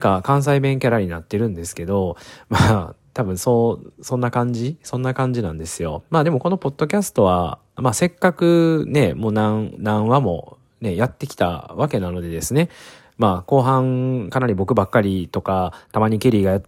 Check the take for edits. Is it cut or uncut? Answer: cut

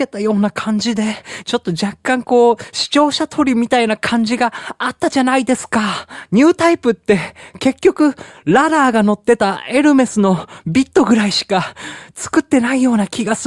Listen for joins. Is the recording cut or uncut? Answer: cut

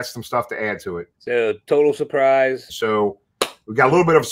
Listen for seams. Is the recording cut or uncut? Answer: cut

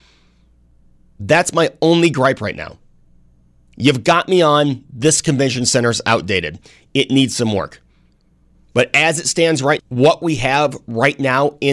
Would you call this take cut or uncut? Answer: cut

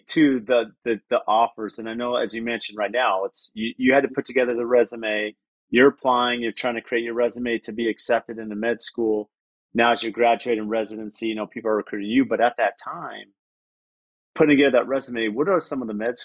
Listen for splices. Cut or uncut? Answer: uncut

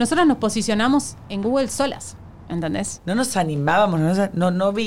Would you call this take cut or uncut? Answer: cut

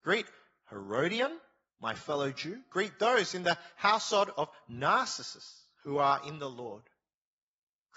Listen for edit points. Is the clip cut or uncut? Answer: uncut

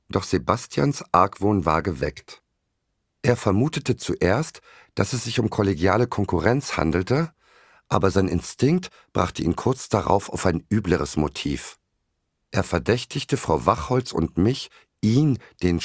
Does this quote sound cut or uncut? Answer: cut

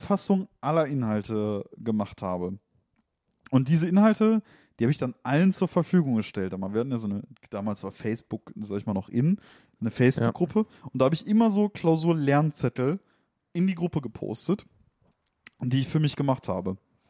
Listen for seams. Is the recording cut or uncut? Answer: uncut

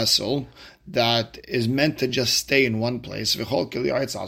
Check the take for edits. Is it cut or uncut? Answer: uncut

